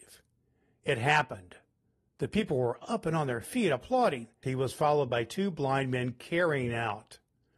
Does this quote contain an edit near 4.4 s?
yes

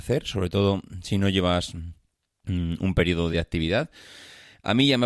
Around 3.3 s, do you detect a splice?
yes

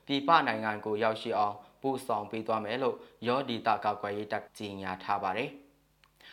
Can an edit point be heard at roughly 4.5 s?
yes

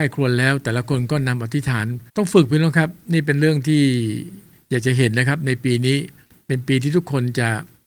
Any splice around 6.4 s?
no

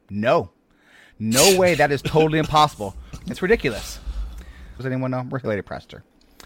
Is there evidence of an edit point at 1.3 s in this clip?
no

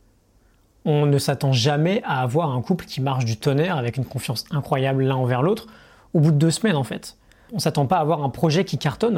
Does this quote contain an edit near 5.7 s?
no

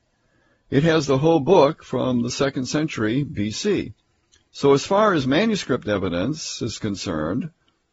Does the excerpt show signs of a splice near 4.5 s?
yes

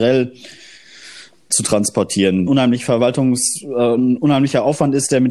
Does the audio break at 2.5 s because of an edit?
yes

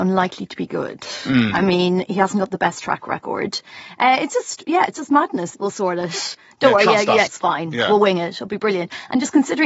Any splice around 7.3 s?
yes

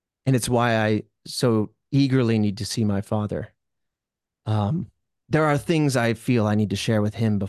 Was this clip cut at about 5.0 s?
no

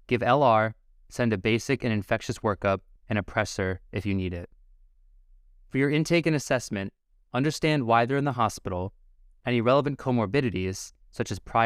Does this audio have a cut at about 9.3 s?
no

